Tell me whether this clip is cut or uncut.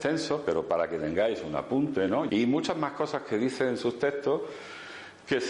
cut